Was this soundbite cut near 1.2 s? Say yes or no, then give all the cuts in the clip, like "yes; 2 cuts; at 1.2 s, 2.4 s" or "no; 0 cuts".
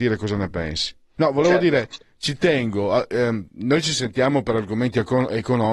yes; 1 cut; at 1.2 s